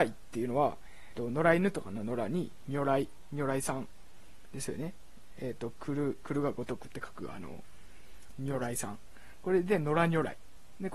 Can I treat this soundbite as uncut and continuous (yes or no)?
no